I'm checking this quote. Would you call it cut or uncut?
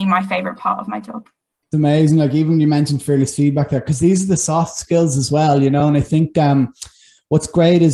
uncut